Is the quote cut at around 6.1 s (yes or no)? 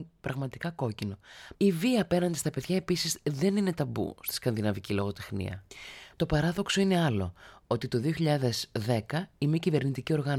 yes